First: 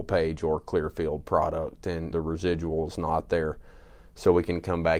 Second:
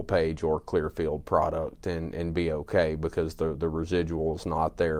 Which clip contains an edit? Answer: first; 1 cut; at 2.1 s

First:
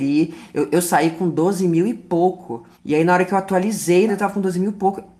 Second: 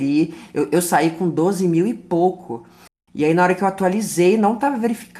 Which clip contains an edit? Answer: first; 2 cuts; at 2.7 s, 4.1 s

